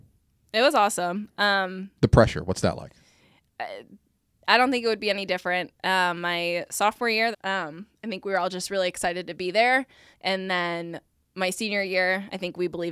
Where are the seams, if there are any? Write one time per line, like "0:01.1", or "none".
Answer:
0:07.3
0:10.1